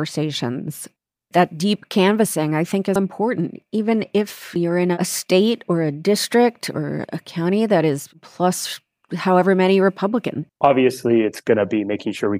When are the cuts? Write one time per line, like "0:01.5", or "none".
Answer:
0:03.0
0:10.5